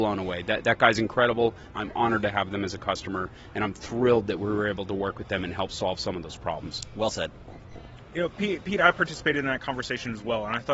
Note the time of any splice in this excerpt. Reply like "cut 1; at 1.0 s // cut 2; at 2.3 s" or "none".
cut 1; at 1.7 s